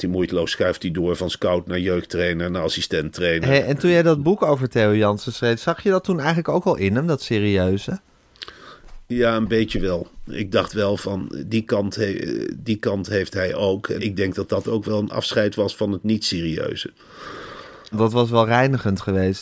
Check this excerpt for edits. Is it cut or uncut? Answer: cut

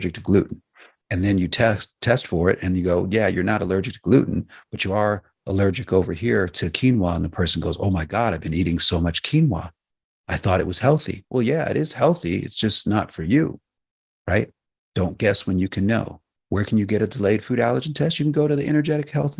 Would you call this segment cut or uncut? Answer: uncut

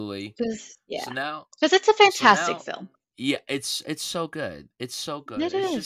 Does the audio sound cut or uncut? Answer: cut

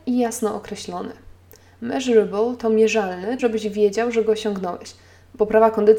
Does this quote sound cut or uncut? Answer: cut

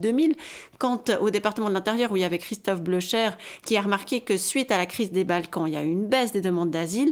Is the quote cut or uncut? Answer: uncut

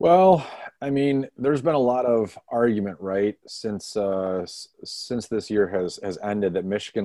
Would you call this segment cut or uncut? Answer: uncut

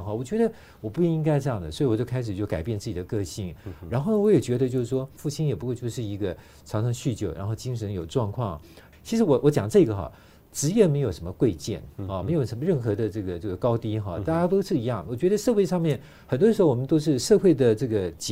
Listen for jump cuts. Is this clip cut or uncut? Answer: cut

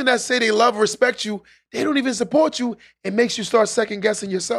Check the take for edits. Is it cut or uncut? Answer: uncut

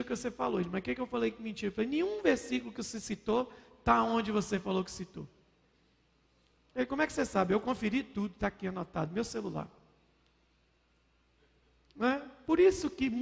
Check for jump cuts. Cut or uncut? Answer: uncut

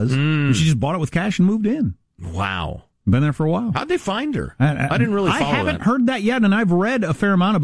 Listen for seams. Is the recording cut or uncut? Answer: uncut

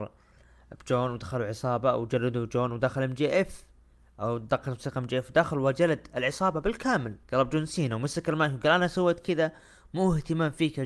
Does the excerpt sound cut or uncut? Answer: cut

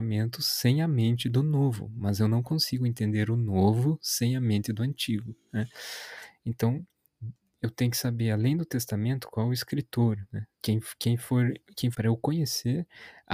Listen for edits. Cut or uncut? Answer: cut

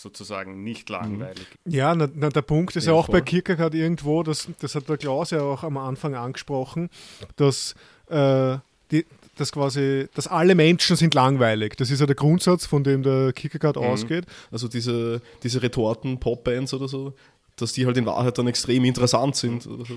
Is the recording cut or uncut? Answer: cut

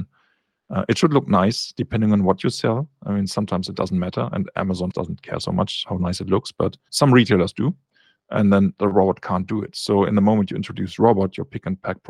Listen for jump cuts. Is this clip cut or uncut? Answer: cut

